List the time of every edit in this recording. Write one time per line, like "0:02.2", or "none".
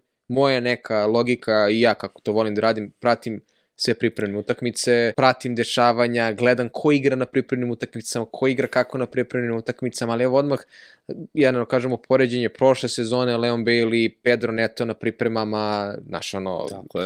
0:05.1